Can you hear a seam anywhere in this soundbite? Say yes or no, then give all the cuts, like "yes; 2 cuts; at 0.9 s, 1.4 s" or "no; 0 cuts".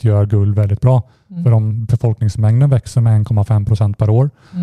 no; 0 cuts